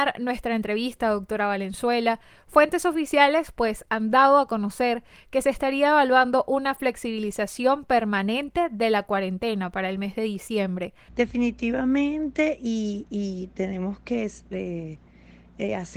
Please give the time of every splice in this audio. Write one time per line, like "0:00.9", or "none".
0:11.1